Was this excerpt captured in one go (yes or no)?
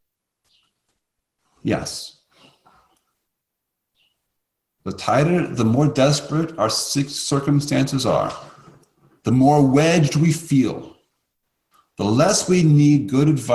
yes